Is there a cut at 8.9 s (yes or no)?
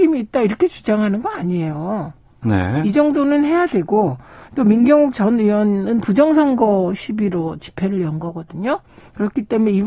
no